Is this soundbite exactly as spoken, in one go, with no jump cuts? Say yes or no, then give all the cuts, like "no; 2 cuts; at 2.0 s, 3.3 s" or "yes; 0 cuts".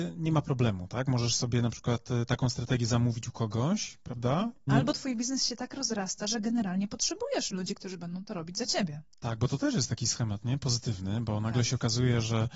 no; 1 cut; at 4.7 s